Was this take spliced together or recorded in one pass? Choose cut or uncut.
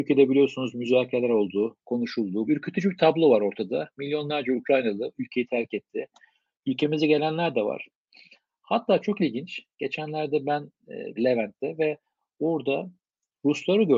cut